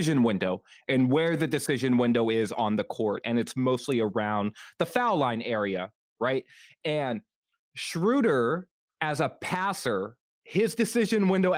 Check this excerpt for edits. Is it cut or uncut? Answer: uncut